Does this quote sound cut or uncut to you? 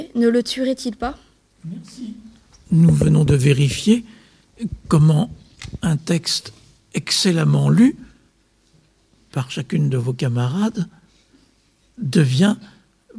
cut